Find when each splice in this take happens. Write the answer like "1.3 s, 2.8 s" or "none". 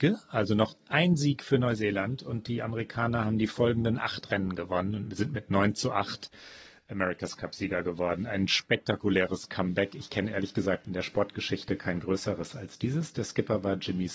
none